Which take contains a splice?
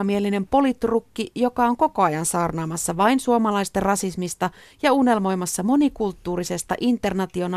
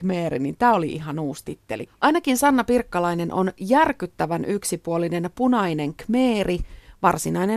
second; 1 cut; at 1.9 s

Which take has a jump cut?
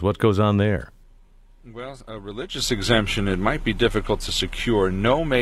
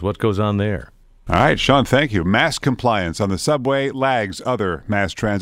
second; 1 cut; at 1.3 s

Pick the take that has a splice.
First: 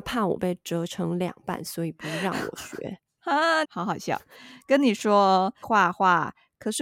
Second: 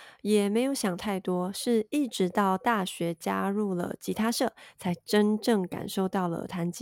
first; 2 cuts; at 3.6 s, 5.6 s

